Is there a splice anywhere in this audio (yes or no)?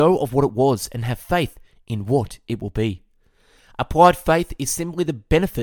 no